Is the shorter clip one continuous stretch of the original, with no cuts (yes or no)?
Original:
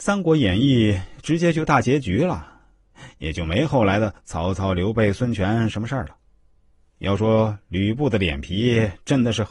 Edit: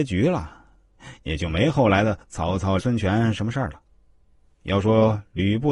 no